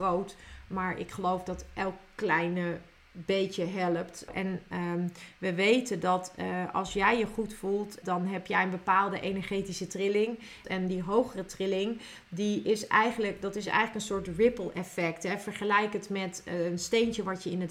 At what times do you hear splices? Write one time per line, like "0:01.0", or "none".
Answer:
0:04.3
0:08.0
0:10.6